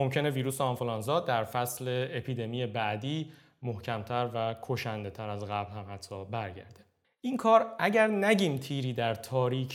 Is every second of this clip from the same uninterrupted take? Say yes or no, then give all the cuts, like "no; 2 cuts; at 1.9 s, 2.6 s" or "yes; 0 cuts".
no; 1 cut; at 7.0 s